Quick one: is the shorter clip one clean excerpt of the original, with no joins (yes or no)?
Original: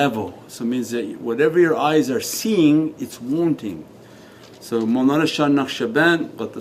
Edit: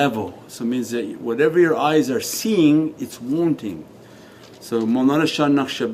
yes